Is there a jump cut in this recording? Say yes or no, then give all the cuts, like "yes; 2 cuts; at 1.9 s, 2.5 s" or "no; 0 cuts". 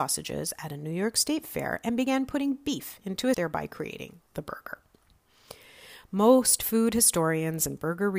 yes; 1 cut; at 3.3 s